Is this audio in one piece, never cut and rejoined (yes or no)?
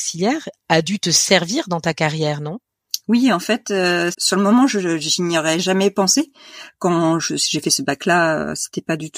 no